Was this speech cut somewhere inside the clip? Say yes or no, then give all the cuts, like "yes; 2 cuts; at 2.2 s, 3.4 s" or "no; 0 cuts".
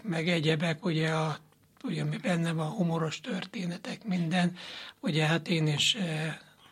no; 0 cuts